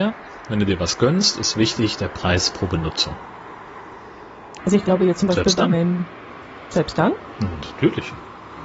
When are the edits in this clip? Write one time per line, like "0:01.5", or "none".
0:04.6